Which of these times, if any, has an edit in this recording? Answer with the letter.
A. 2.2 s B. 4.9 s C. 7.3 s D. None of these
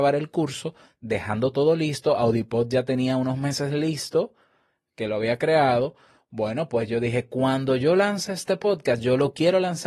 D